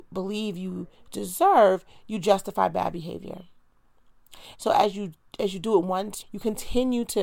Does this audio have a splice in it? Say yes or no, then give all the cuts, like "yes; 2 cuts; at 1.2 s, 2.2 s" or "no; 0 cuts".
yes; 2 cuts; at 4.5 s, 6.2 s